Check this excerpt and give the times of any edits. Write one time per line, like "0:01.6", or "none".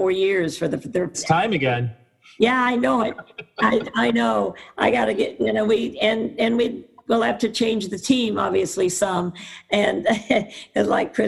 0:01.1